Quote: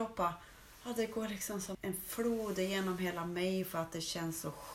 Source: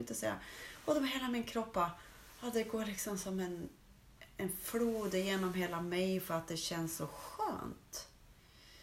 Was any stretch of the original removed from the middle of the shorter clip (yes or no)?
yes